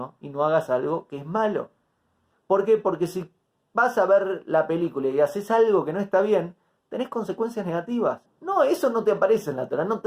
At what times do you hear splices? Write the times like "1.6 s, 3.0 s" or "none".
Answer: 2.3 s, 8.3 s